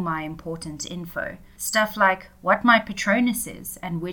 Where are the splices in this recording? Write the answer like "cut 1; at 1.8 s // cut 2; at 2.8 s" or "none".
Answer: none